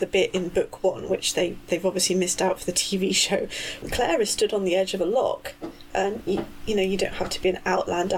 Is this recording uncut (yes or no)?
no